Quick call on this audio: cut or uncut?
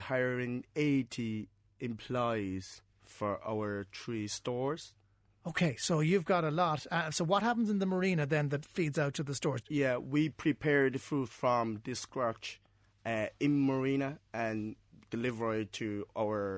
cut